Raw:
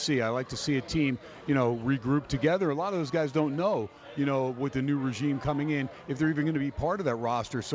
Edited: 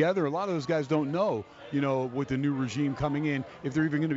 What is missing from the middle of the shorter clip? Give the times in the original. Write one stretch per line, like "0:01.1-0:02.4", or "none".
none